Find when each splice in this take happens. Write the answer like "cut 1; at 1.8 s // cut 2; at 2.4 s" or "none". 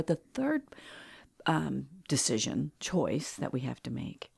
none